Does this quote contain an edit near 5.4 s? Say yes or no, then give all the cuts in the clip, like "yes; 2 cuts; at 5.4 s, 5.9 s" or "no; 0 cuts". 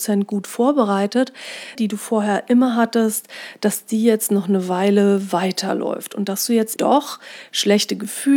no; 2 cuts; at 1.7 s, 6.8 s